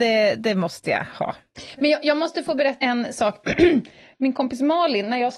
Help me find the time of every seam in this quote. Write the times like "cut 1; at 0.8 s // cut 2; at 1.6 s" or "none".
cut 1; at 2.8 s